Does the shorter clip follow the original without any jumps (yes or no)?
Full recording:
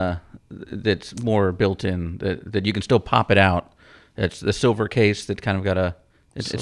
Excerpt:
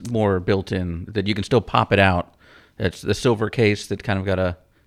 no